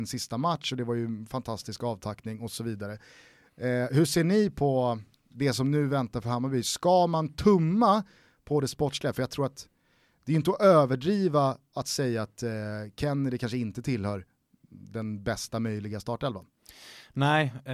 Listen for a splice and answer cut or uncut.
uncut